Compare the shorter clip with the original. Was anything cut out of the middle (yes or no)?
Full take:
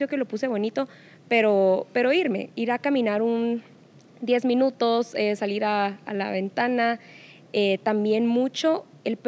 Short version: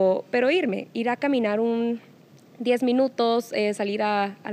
no